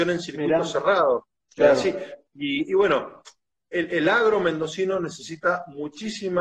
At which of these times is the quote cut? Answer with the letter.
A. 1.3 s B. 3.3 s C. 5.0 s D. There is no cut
A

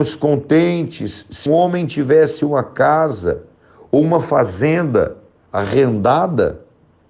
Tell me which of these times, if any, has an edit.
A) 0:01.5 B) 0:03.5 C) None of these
A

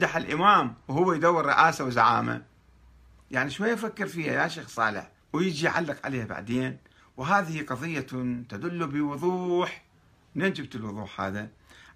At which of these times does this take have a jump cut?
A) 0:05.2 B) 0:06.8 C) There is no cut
A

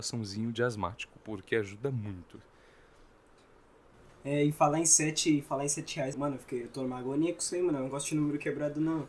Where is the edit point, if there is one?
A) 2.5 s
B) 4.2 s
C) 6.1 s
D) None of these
C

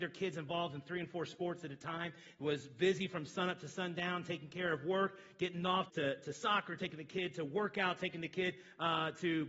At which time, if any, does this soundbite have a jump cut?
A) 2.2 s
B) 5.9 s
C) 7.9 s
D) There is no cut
B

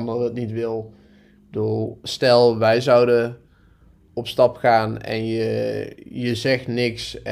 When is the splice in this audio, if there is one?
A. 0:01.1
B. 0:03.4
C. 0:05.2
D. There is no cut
D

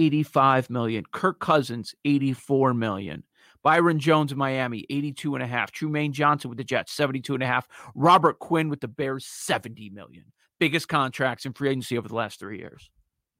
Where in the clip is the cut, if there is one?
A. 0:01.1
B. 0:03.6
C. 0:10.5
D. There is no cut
D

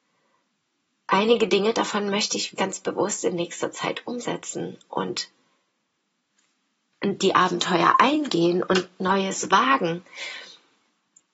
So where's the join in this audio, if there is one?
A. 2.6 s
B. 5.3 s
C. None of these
A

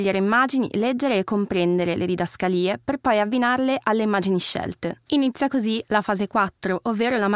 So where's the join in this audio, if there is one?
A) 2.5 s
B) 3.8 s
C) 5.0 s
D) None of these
D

